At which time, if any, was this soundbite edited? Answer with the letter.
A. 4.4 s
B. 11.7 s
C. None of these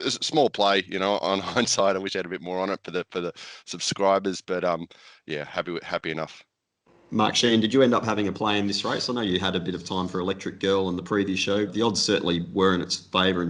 B